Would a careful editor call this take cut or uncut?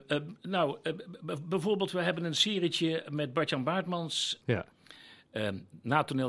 cut